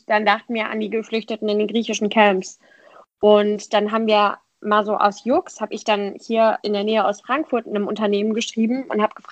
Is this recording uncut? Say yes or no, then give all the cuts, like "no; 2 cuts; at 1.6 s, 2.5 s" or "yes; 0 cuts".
yes; 0 cuts